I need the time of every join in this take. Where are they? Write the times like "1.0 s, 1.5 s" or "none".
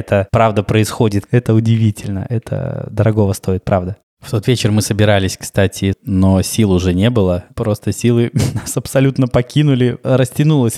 1.3 s, 5.9 s

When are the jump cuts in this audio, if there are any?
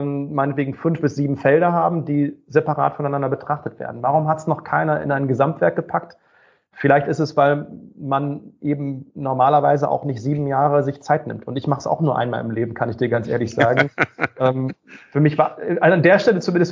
none

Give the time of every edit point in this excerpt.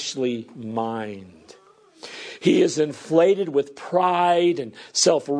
none

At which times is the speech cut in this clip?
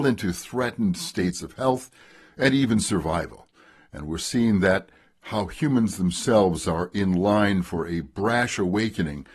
none

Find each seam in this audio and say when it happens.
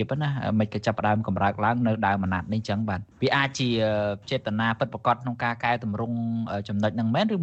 3.1 s

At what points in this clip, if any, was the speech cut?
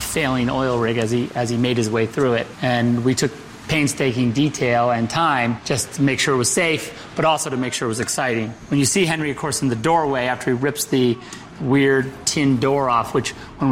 none

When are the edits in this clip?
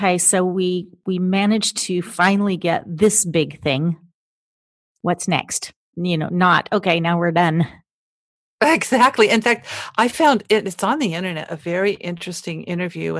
none

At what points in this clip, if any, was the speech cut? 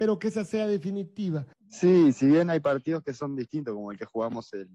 1.5 s

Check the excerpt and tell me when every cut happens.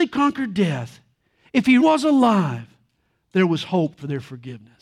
1.8 s

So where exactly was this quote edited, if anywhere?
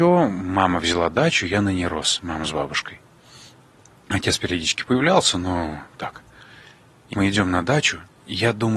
7.1 s

